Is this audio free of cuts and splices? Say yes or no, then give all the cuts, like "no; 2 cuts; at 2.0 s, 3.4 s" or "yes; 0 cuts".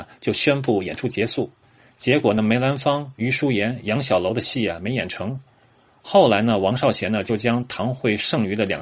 yes; 0 cuts